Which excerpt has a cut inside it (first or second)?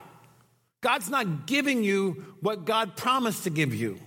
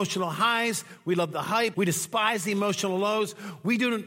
second